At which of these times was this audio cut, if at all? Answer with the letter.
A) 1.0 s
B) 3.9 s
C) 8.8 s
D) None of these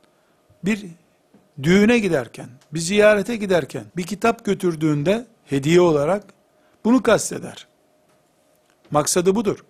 B